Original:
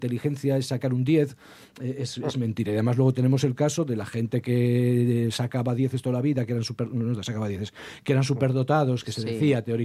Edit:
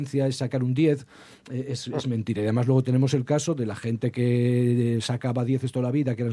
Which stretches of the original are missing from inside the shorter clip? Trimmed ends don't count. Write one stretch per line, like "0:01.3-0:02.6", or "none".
none